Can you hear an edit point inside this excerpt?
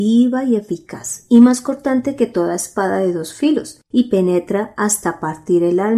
no; 0 cuts

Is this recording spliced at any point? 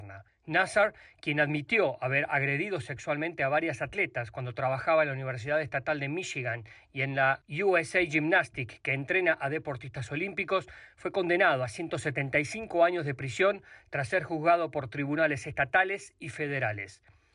no; 0 cuts

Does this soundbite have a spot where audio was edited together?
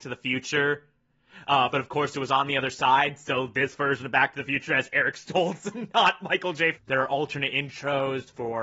yes; 2 cuts; at 1.7 s, 6.7 s

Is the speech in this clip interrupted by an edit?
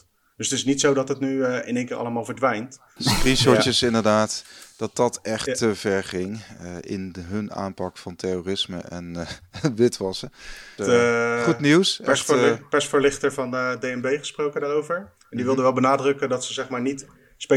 yes; 2 cuts; at 3.0 s, 10.8 s

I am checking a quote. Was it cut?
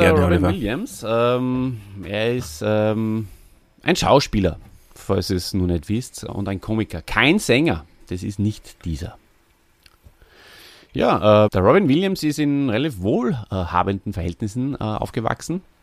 yes; 3 cuts; at 6.3 s, 8.0 s, 11.5 s

